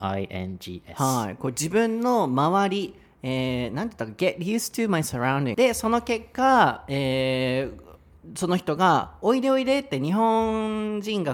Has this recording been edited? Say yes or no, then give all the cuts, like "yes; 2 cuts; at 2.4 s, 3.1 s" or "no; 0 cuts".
yes; 1 cut; at 5.5 s